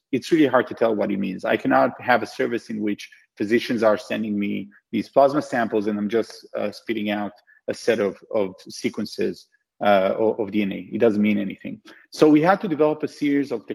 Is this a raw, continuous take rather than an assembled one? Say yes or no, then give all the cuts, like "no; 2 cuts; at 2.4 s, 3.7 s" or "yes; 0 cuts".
yes; 0 cuts